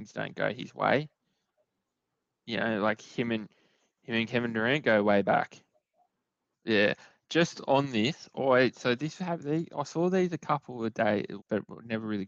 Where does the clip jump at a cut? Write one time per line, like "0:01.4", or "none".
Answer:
0:06.5
0:11.4